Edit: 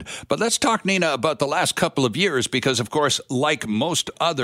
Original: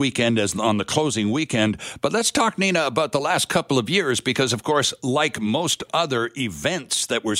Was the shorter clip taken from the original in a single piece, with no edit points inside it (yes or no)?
yes